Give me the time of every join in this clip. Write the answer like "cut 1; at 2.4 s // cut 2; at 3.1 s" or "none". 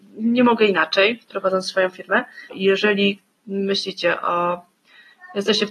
cut 1; at 2.5 s